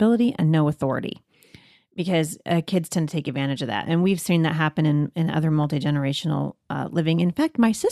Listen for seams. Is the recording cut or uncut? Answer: uncut